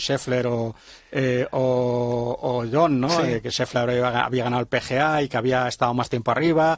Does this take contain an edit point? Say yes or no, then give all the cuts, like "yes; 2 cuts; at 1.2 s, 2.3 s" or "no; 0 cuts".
no; 0 cuts